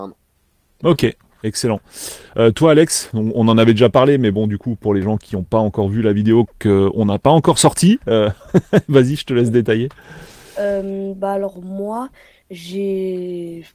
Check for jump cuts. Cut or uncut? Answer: uncut